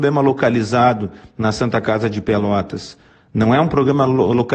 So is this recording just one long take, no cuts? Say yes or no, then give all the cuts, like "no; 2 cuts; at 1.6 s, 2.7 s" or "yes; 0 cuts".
yes; 0 cuts